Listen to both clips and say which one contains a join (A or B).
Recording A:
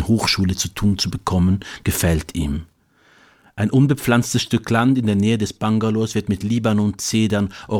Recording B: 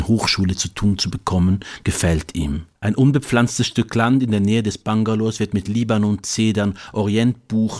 B